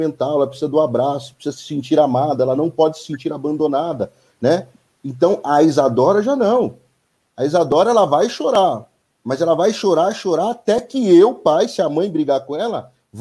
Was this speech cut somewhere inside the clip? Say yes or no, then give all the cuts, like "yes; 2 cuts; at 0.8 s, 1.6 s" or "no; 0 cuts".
no; 0 cuts